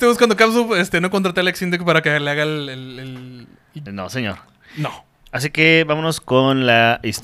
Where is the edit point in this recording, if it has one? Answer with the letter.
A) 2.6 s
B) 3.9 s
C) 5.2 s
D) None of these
B